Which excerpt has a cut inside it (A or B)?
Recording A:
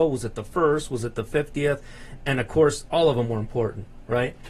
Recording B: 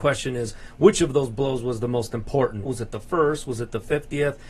B